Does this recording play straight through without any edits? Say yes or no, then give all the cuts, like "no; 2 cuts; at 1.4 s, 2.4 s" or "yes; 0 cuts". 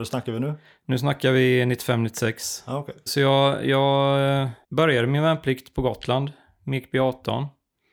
no; 2 cuts; at 3.1 s, 4.6 s